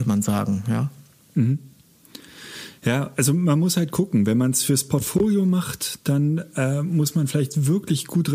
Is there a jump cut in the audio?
no; 0 cuts

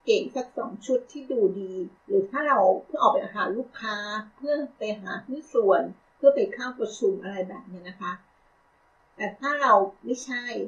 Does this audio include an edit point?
yes; 1 cut; at 2.0 s

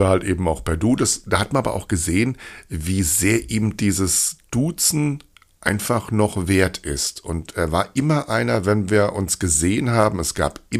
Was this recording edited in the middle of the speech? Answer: no; 0 cuts

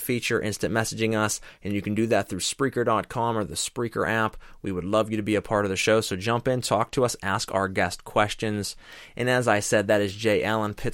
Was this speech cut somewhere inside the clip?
no; 0 cuts

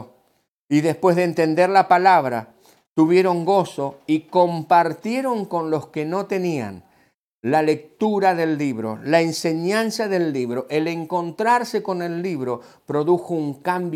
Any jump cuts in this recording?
no; 0 cuts

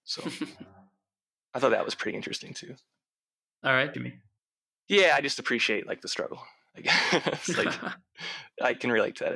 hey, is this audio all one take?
no; 1 cut; at 3.9 s

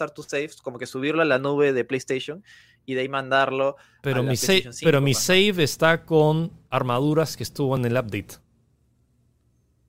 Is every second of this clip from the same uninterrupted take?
yes; 0 cuts

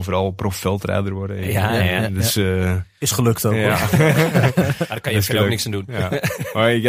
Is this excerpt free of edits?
yes; 0 cuts

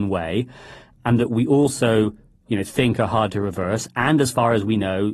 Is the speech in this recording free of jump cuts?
yes; 0 cuts

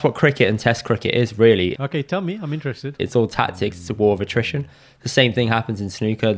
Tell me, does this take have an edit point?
yes; 2 cuts; at 1.7 s, 3.0 s

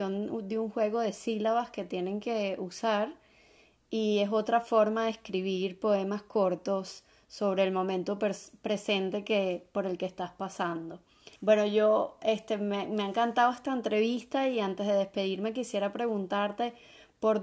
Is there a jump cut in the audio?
yes; 1 cut; at 11.4 s

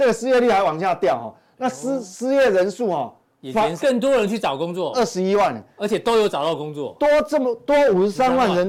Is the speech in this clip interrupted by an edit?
yes; 1 cut; at 3.8 s

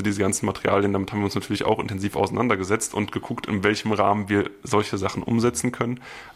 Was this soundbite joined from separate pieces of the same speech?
no; 0 cuts

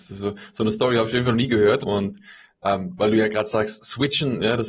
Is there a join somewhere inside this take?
yes; 1 cut; at 1.8 s

